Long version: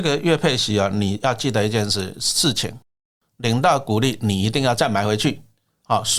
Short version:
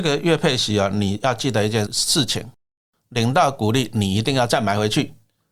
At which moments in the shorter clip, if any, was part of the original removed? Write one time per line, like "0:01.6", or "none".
0:01.9